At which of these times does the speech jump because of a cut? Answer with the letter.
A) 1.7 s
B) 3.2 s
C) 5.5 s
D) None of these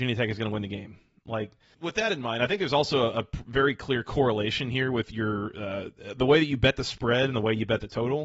A